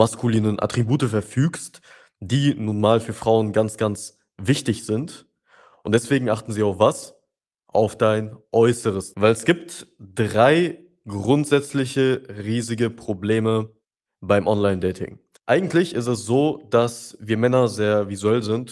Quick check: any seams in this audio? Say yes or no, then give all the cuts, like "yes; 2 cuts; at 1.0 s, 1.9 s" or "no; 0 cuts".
yes; 2 cuts; at 9.1 s, 15.4 s